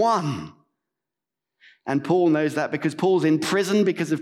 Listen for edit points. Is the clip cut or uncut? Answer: uncut